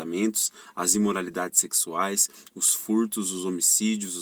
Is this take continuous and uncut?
yes; 0 cuts

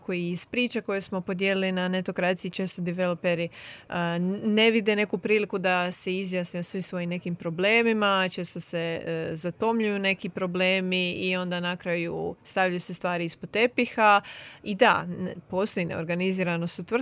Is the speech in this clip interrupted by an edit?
no; 0 cuts

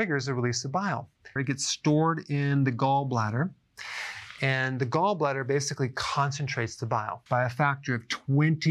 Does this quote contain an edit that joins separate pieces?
yes; 2 cuts; at 1.4 s, 7.3 s

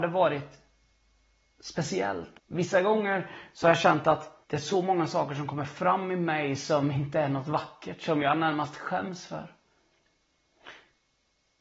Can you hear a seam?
yes; 2 cuts; at 2.3 s, 4.4 s

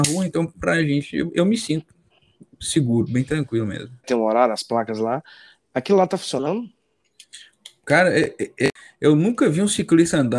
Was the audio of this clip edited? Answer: yes; 1 cut; at 4.0 s

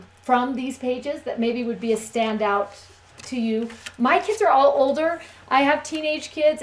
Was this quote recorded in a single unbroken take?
yes; 0 cuts

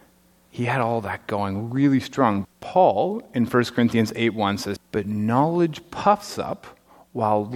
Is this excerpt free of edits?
no; 2 cuts; at 2.4 s, 4.8 s

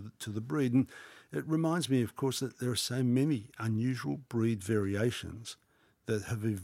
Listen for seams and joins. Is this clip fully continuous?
yes; 0 cuts

